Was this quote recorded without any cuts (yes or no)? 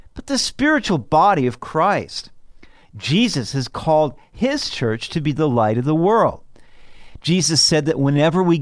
yes